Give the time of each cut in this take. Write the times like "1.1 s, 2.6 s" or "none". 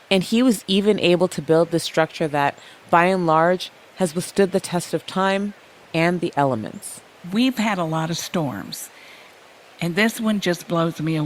none